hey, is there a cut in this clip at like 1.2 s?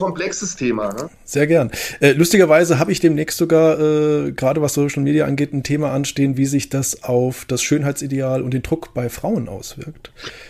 no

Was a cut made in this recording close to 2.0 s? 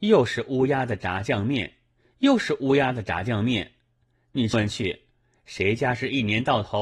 no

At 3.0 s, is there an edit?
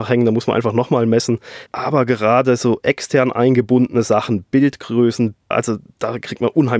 no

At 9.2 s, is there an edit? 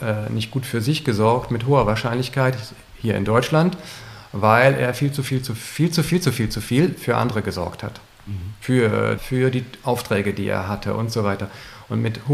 yes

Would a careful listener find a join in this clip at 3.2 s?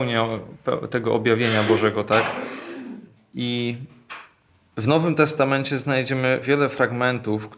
no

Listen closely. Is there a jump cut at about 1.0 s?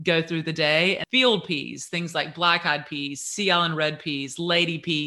yes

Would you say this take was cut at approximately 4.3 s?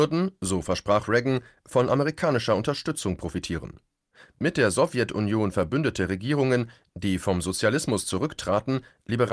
yes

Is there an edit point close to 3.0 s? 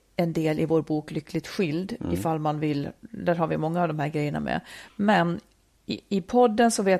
no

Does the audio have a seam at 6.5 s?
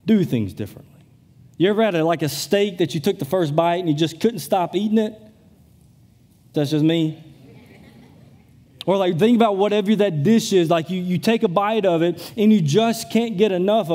yes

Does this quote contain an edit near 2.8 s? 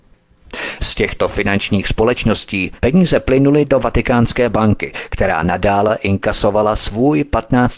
yes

